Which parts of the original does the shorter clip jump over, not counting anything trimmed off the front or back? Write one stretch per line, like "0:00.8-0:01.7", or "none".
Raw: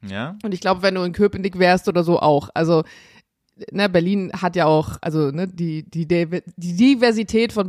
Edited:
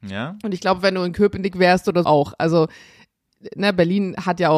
0:02.0-0:02.2